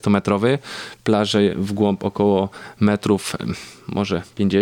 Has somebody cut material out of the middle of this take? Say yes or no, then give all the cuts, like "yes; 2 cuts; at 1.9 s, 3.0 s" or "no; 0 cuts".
no; 0 cuts